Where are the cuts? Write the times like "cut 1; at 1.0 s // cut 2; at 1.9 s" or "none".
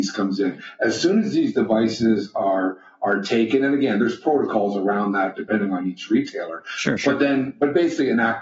none